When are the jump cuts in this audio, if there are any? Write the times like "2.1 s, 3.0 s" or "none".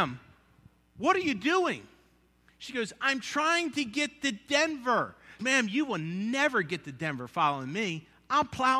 5.4 s